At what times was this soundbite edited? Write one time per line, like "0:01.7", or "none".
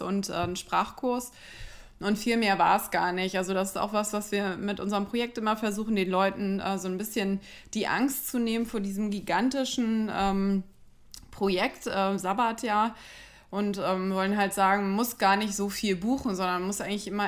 none